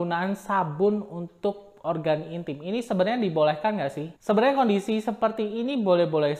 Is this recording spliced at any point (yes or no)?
yes